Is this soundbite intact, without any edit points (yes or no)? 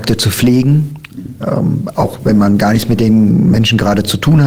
yes